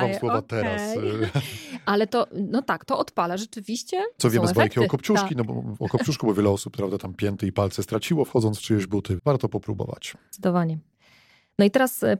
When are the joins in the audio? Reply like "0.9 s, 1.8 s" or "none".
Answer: 4.2 s, 9.2 s